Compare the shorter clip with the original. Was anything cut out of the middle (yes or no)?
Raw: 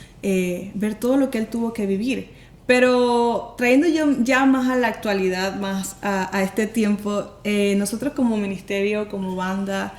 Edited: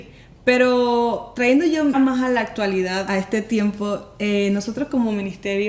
yes